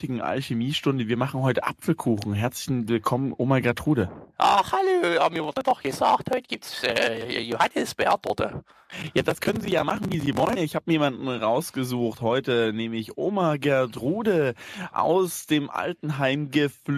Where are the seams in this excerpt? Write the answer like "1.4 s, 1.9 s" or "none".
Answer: 10.6 s